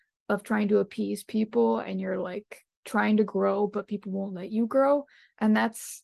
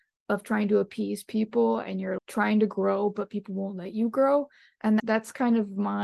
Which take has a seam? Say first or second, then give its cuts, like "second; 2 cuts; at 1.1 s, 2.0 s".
second; 2 cuts; at 2.2 s, 5.0 s